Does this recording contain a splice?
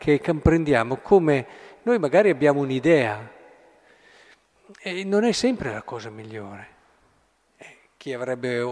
yes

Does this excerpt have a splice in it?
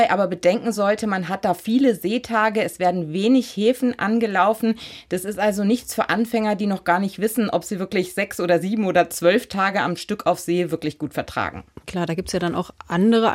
no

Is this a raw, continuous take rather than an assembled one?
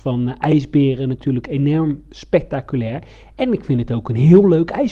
yes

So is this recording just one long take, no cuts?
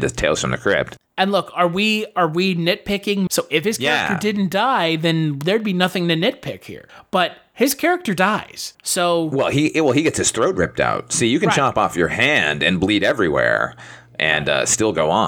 no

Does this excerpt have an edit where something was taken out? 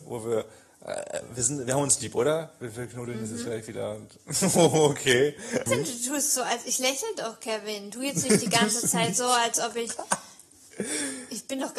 yes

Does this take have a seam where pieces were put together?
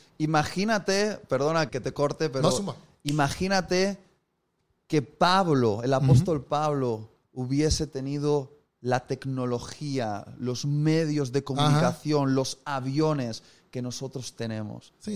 yes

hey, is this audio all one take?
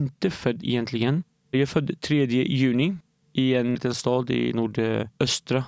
no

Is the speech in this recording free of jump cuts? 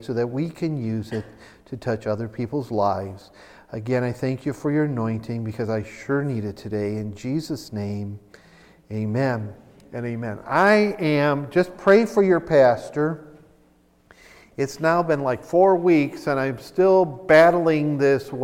yes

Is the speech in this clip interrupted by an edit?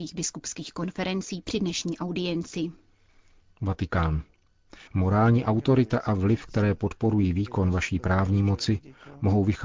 yes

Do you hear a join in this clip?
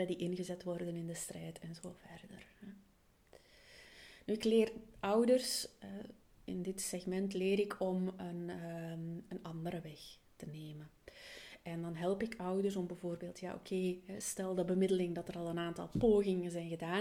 no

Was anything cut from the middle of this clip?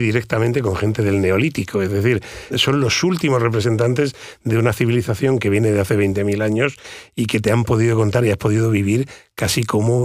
yes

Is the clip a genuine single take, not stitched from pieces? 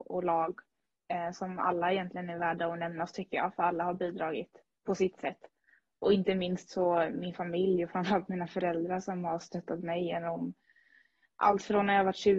yes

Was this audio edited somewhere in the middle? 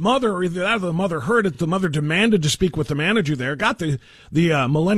no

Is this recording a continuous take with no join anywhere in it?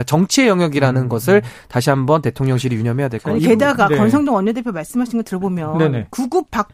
yes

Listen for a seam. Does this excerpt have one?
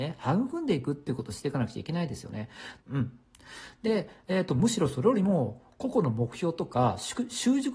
yes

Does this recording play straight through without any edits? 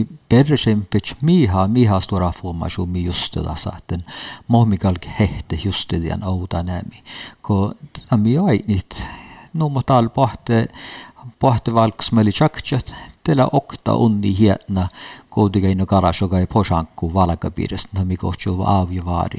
yes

